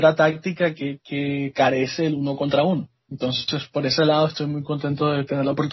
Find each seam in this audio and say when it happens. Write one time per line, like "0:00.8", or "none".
none